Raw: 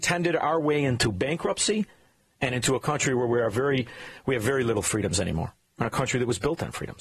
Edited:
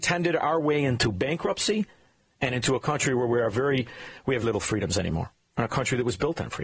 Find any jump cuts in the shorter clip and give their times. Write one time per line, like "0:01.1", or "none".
0:04.4